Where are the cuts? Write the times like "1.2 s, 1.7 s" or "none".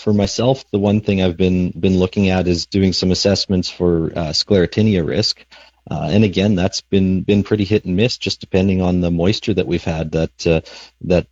none